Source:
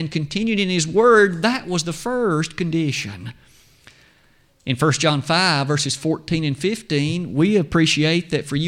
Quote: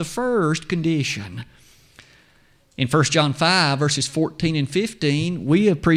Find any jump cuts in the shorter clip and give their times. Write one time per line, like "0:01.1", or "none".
none